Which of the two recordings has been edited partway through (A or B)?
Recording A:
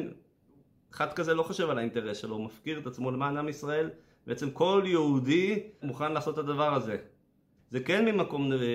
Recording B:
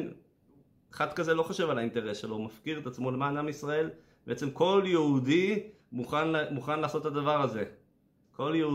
A